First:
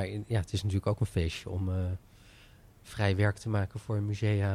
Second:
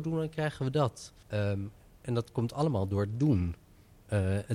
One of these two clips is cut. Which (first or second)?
second